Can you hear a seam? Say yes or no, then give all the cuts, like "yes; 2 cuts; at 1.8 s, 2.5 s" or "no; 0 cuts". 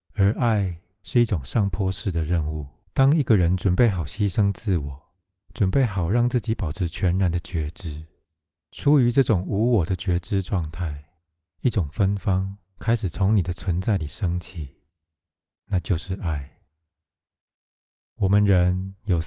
yes; 1 cut; at 2.8 s